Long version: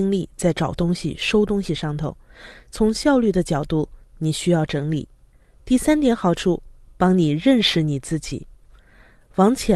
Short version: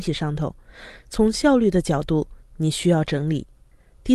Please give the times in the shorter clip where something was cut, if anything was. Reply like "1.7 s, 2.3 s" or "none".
none